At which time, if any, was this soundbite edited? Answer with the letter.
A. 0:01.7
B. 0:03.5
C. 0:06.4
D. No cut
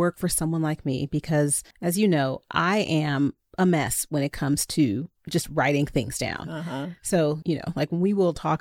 A